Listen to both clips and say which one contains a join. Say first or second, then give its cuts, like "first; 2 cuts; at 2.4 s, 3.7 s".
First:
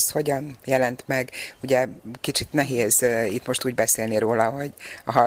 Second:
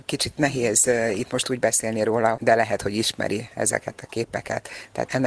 second; 1 cut; at 2.4 s